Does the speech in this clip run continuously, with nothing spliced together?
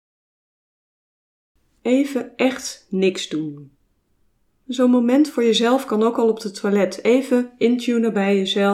no; 1 cut; at 1.8 s

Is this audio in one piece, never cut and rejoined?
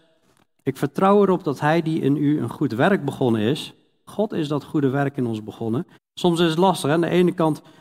no; 2 cuts; at 4.1 s, 6.0 s

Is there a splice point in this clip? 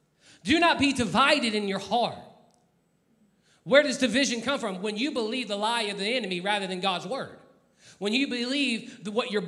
no; 0 cuts

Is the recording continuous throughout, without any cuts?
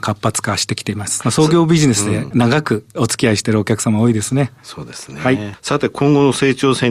no; 1 cut; at 1.2 s

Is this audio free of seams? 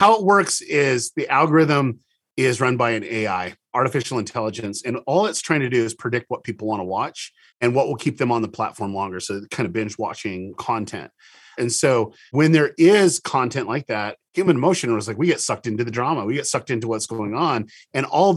no; 1 cut; at 11.6 s

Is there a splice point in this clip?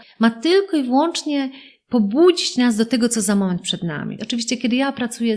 yes; 1 cut; at 4.2 s

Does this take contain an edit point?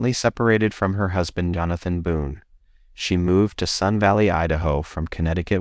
no; 0 cuts

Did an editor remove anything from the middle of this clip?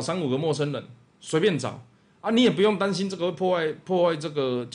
no; 0 cuts

